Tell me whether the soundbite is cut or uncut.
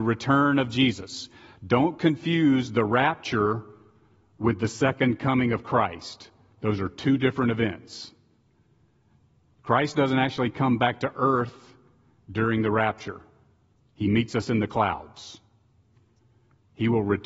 uncut